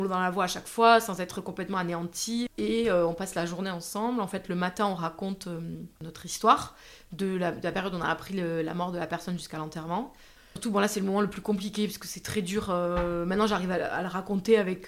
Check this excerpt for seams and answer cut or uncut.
cut